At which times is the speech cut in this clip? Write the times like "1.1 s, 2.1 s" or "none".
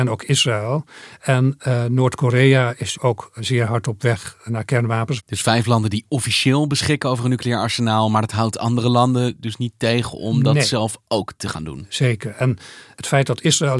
none